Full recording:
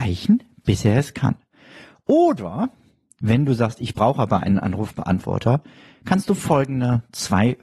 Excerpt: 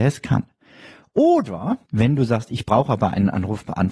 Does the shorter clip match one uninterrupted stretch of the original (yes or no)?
no